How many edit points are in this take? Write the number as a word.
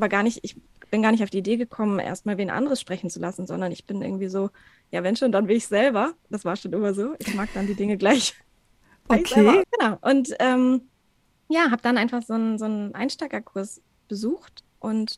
one